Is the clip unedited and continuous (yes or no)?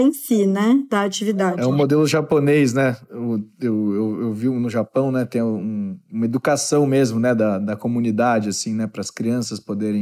yes